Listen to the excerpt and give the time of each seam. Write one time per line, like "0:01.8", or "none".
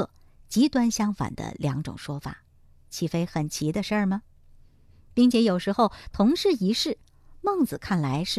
none